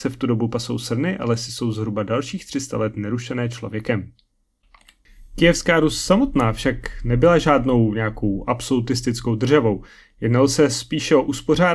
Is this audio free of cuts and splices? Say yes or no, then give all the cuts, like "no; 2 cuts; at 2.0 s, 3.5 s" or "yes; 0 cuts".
yes; 0 cuts